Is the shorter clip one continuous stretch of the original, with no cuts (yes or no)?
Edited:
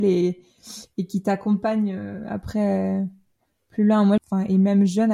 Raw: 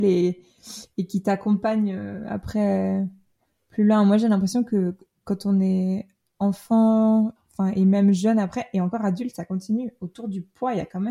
no